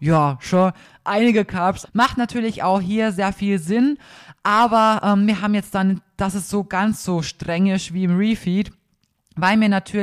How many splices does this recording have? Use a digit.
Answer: 1